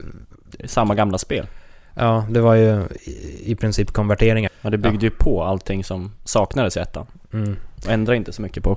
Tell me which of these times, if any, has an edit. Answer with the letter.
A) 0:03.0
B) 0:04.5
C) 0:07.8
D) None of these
B